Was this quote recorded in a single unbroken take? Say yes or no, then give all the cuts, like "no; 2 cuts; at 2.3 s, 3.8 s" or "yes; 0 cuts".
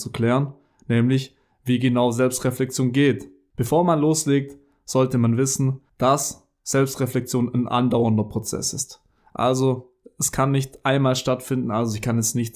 yes; 0 cuts